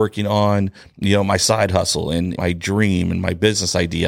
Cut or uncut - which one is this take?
cut